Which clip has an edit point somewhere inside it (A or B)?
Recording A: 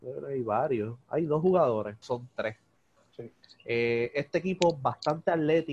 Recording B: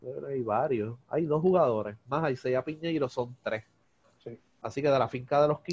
A